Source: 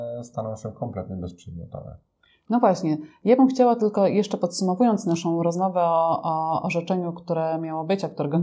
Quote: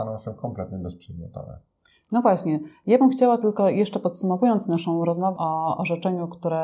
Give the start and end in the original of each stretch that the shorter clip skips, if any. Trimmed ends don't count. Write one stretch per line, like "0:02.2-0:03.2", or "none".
0:05.7-0:06.2